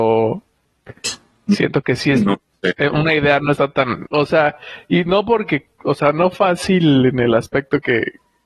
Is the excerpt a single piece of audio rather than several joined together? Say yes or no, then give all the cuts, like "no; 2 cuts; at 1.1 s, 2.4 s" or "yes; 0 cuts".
no; 1 cut; at 4.0 s